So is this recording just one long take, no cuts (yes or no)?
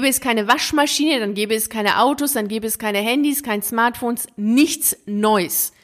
yes